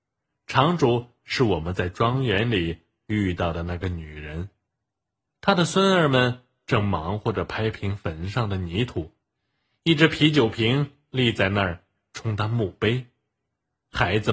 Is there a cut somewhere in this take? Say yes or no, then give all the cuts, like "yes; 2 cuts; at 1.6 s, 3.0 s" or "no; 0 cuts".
yes; 1 cut; at 5.2 s